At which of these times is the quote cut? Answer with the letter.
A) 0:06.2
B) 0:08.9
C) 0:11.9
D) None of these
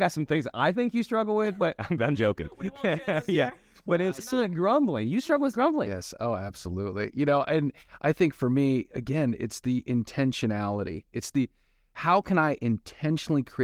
B